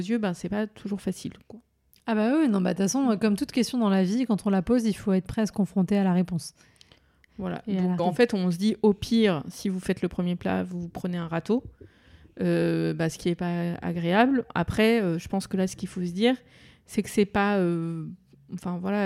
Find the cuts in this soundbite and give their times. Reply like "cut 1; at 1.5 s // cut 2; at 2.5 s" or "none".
cut 1; at 8.0 s